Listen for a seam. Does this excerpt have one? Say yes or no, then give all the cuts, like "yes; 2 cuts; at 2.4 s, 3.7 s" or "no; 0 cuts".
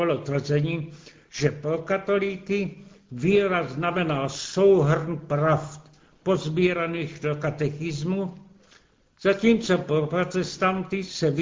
no; 0 cuts